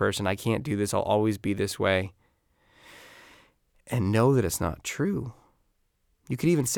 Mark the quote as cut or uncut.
uncut